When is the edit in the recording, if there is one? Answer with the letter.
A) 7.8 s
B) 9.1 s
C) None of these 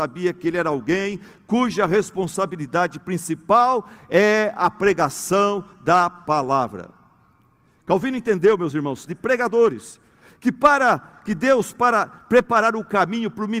B